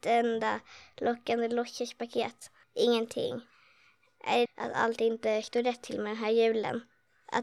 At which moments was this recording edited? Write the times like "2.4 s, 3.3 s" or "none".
2.6 s, 4.5 s

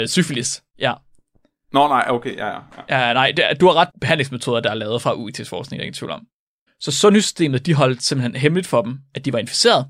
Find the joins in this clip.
3.9 s, 6.7 s

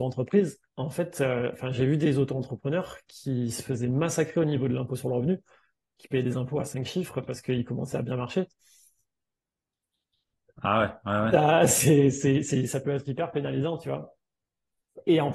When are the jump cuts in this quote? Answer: none

